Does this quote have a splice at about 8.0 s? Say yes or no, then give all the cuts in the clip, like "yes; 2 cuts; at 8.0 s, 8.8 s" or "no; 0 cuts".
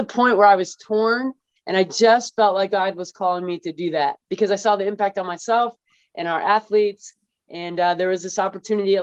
no; 1 cut; at 1.6 s